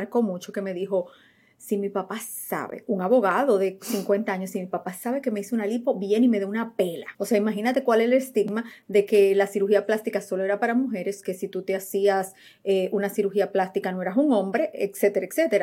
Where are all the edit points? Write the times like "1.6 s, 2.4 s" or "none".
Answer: 7.1 s